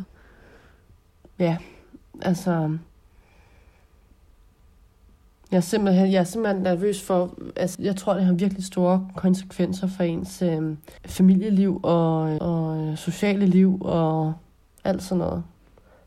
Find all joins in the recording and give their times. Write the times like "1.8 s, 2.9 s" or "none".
7.7 s, 11.0 s, 12.4 s